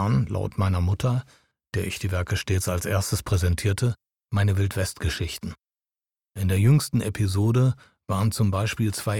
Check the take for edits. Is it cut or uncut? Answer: uncut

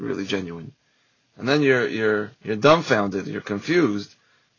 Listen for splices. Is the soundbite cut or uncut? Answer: cut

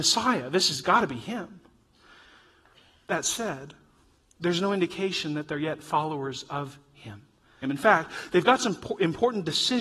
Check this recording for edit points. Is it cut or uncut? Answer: cut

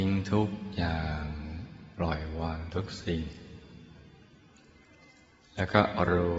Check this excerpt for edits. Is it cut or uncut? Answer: uncut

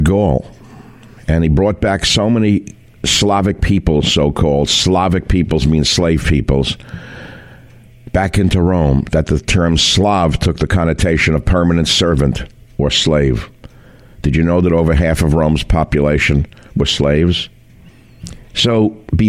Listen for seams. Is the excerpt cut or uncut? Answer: uncut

